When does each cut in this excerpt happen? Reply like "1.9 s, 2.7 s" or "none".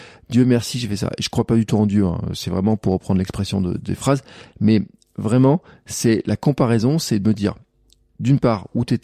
none

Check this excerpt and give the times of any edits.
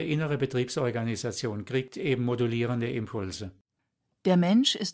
none

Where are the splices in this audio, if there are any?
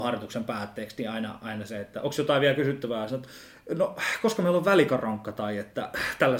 none

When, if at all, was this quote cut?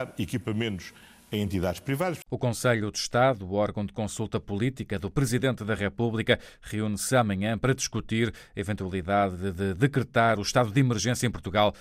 none

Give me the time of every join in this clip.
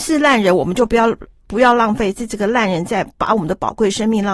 none

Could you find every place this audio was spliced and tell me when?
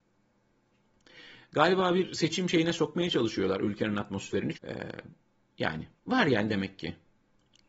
4.5 s, 6.0 s

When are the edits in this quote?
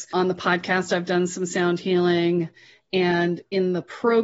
none

